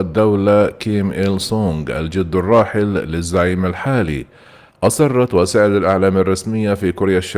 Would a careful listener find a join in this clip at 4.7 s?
yes; 1 cut; at 4.7 s

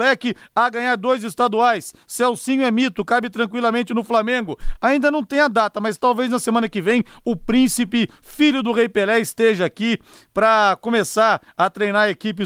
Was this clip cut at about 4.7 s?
yes; 1 cut; at 4.7 s

